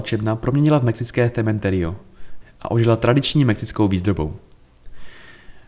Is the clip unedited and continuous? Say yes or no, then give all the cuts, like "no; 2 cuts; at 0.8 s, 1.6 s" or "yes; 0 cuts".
no; 1 cut; at 2.4 s